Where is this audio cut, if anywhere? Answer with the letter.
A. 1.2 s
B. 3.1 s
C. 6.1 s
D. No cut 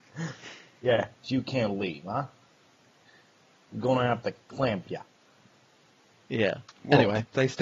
A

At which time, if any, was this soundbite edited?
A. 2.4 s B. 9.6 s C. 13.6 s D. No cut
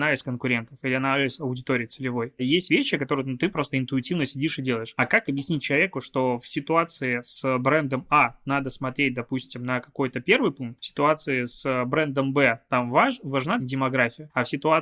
C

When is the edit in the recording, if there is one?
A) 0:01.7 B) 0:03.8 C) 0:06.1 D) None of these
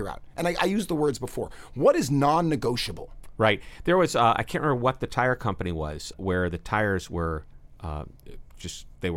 C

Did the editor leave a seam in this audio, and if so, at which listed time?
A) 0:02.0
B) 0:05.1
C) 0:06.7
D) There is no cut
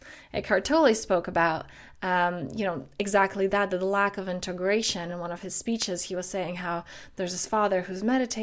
D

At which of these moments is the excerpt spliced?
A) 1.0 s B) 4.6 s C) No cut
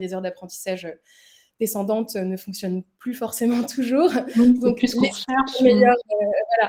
C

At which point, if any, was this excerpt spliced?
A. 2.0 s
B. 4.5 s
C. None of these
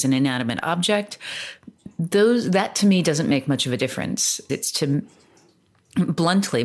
B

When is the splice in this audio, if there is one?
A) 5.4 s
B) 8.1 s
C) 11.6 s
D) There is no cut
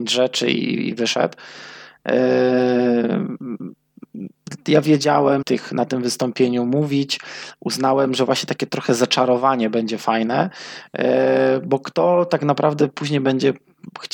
A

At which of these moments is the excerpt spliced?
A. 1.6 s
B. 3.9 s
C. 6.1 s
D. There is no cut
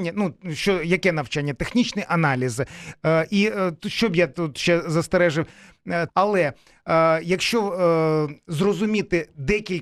C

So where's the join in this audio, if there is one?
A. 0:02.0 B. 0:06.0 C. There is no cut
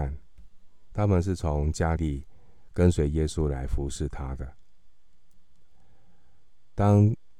A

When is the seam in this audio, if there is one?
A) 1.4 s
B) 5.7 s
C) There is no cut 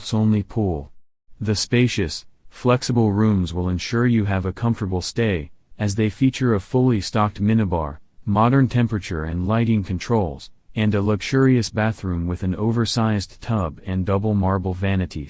A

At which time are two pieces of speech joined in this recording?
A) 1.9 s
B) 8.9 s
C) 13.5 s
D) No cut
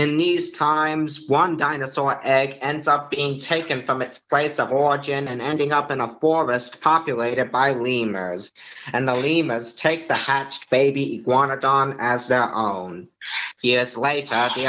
D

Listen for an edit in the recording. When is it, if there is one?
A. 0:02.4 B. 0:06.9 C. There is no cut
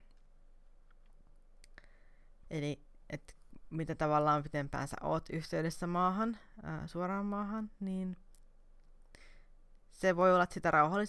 A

